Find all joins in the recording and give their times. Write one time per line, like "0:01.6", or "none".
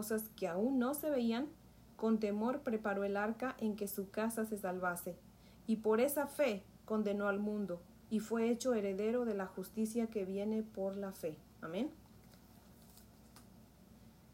none